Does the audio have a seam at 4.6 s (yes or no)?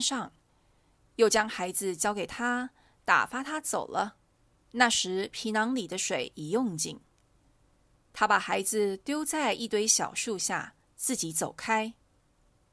yes